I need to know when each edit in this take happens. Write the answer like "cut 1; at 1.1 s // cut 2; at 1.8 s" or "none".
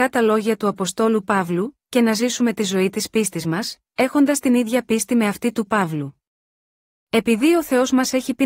cut 1; at 1.8 s